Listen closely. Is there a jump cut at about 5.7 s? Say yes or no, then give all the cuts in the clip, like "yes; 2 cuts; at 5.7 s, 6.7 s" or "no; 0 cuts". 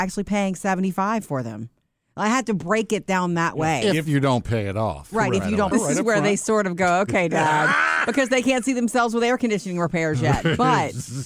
yes; 1 cut; at 5.7 s